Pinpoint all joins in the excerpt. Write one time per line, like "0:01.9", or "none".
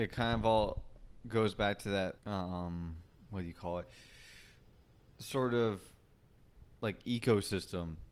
0:02.2

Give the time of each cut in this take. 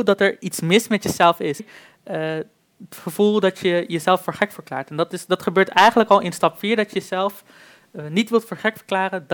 0:01.6

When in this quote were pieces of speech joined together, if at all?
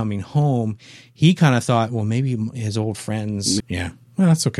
0:03.6

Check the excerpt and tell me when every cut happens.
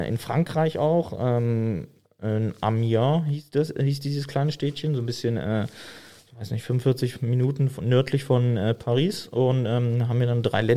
none

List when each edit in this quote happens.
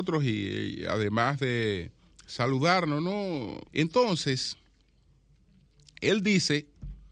0:03.7

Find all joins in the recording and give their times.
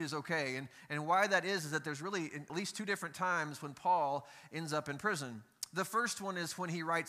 0:02.5

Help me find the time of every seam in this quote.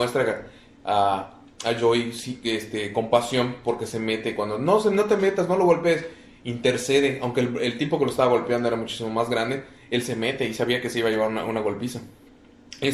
none

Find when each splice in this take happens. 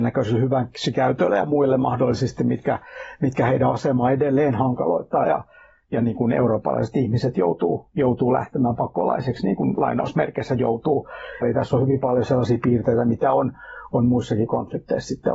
0:05.2
0:11.4

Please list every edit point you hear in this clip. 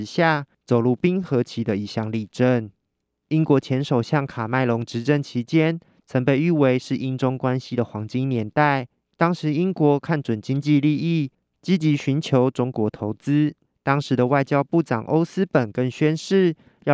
none

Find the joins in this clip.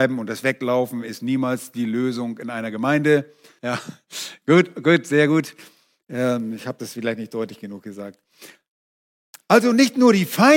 0:03.6

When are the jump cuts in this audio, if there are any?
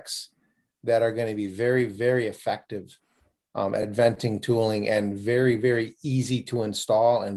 none

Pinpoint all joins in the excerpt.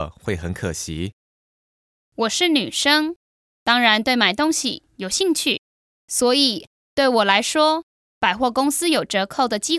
none

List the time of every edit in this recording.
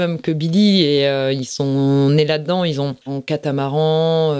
0:03.0

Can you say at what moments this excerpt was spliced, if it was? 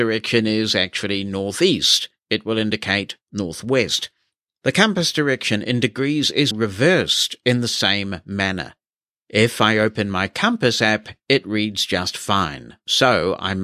0:06.5

